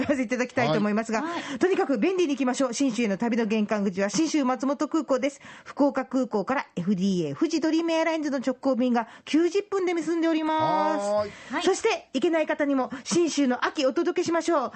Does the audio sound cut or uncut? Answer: uncut